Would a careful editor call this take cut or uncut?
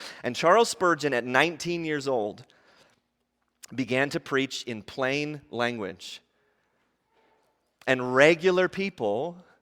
uncut